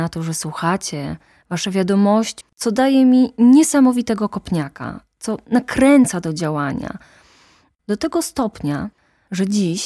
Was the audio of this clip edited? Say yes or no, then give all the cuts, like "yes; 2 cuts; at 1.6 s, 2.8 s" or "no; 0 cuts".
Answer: yes; 1 cut; at 2.4 s